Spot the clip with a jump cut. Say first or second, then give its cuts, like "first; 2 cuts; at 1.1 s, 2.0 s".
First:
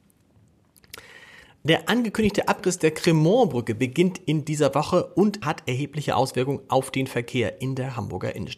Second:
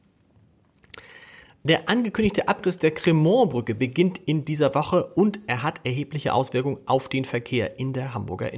first; 1 cut; at 5.4 s